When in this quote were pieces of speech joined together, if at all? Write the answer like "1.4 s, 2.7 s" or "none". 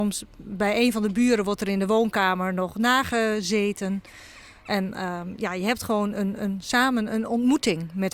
none